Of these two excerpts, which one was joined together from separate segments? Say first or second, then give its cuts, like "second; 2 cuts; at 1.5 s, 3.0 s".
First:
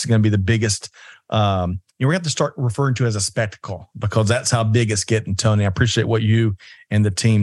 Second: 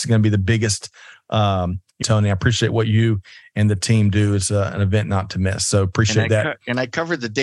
second; 1 cut; at 2.0 s